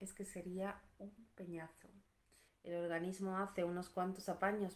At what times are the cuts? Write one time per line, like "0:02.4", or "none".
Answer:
0:02.5